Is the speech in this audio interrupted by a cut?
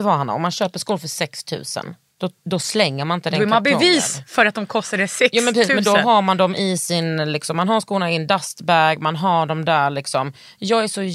no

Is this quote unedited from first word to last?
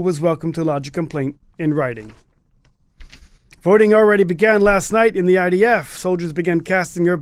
yes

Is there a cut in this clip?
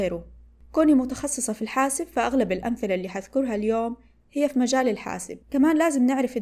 yes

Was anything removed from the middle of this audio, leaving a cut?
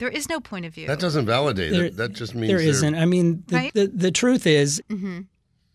yes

